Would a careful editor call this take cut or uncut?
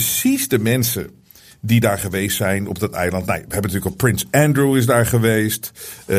uncut